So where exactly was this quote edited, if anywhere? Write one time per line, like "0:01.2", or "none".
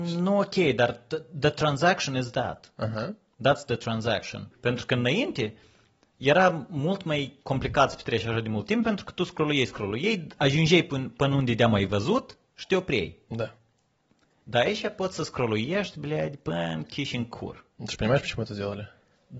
0:04.5